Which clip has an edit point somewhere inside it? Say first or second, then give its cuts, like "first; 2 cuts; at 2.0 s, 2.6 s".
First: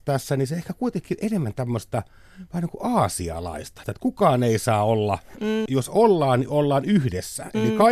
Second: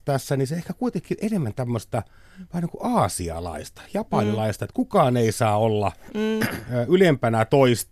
first; 2 cuts; at 3.8 s, 5.7 s